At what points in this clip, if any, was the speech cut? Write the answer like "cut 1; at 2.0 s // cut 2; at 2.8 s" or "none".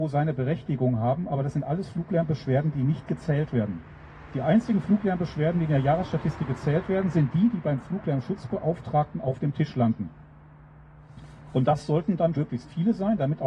cut 1; at 12.4 s